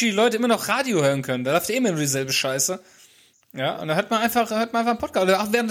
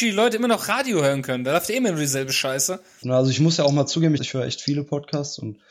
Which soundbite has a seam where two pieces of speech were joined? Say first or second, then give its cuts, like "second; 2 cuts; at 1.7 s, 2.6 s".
second; 2 cuts; at 3.0 s, 4.2 s